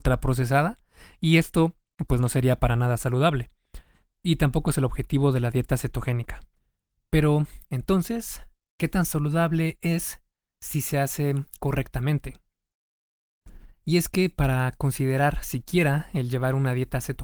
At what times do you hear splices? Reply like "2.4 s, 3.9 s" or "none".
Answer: none